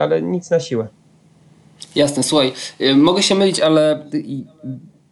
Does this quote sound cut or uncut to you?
uncut